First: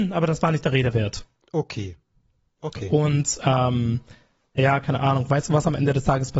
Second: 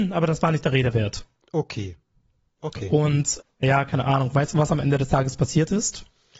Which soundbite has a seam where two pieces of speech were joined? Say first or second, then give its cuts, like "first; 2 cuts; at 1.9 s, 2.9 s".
second; 1 cut; at 3.4 s